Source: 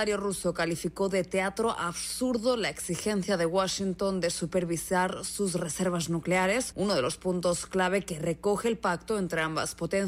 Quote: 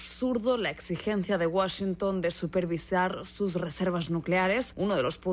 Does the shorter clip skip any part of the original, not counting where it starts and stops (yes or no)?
no